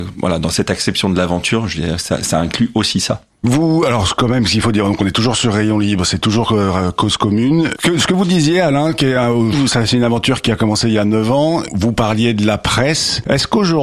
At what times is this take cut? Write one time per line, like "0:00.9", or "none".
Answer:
0:07.8
0:09.5